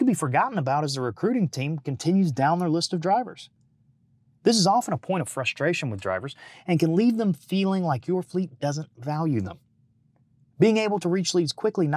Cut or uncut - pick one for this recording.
uncut